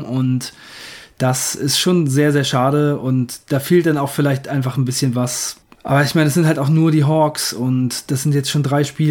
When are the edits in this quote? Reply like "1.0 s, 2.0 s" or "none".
5.8 s

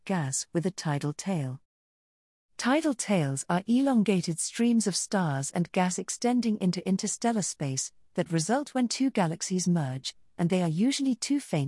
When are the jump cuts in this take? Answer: none

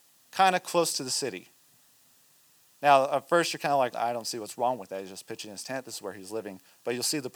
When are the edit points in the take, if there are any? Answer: 3.9 s

